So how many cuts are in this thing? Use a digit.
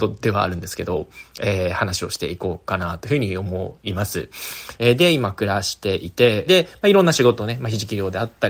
2